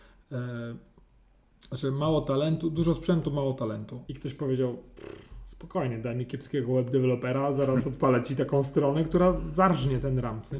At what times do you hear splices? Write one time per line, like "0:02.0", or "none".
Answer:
0:04.1